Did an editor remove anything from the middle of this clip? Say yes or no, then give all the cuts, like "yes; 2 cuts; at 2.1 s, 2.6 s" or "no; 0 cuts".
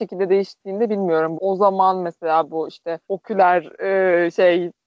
yes; 2 cuts; at 1.3 s, 3.0 s